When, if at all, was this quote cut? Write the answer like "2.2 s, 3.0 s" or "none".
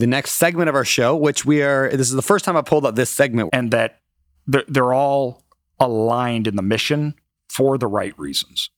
3.5 s